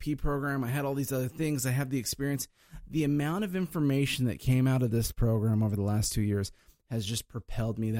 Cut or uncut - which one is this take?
uncut